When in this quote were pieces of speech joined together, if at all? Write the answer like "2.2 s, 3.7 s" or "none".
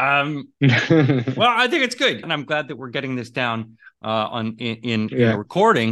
2.2 s